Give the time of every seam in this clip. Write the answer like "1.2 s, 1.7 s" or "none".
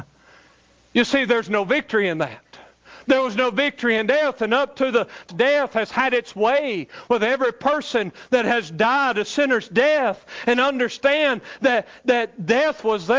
5.3 s